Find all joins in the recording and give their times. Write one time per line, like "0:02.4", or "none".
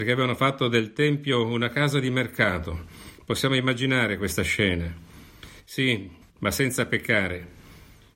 0:06.2